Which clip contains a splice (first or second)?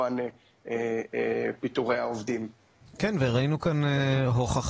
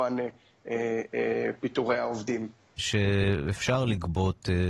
second